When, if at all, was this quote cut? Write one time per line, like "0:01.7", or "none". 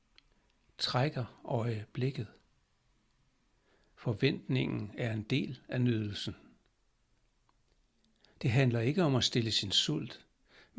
none